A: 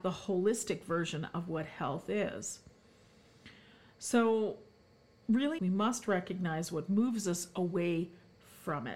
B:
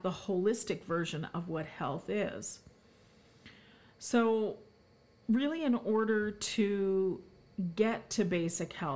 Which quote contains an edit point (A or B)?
A